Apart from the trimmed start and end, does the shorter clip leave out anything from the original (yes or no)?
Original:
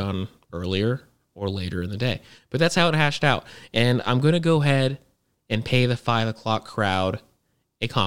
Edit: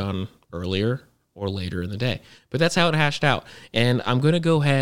no